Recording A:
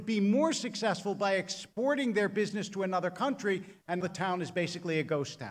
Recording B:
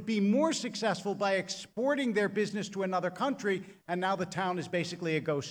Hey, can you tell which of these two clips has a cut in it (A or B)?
A